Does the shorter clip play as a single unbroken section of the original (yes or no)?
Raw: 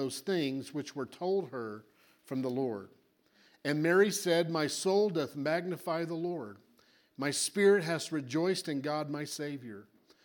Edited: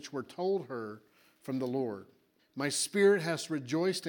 no